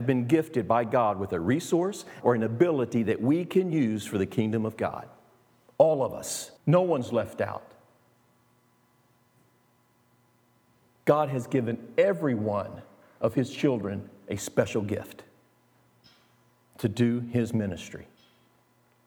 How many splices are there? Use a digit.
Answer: 2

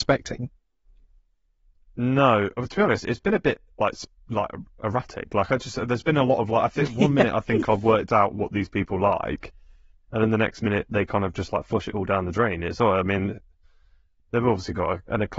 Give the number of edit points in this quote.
0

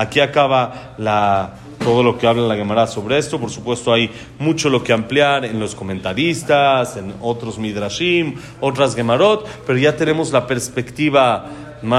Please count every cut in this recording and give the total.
0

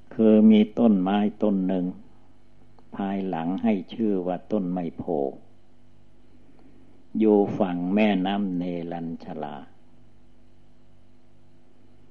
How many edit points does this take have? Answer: 0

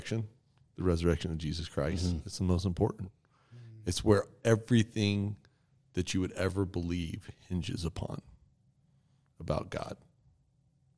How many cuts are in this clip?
0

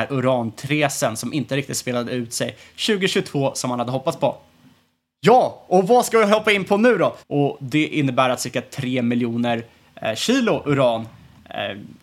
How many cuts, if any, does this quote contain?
1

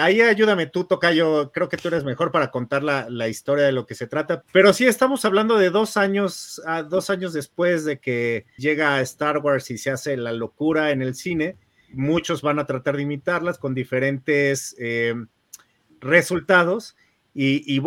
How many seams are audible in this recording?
3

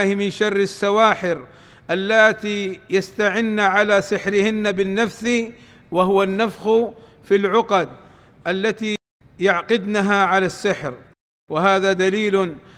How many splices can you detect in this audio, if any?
0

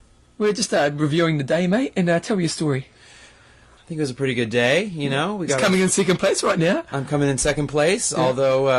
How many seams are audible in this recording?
1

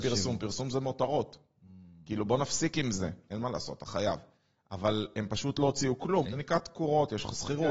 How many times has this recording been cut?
2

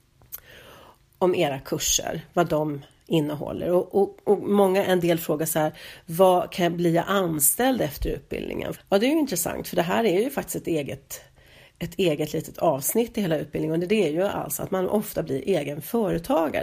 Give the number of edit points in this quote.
1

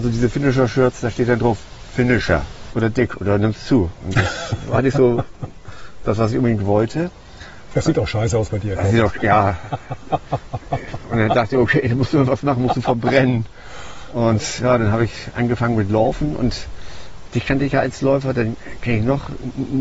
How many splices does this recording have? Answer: 1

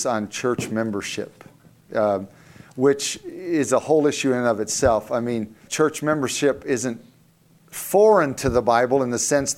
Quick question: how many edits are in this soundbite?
1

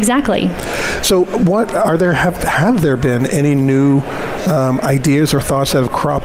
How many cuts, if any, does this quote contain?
0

